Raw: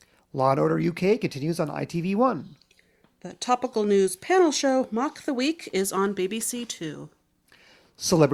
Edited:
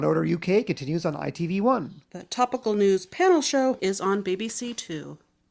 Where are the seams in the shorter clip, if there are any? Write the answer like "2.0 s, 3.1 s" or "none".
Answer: 2.0 s, 3.8 s